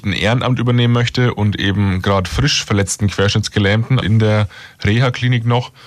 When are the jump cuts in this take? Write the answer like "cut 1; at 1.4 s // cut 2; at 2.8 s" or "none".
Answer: cut 1; at 4.0 s